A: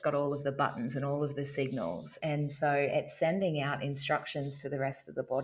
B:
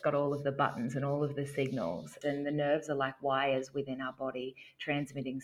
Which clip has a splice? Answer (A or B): B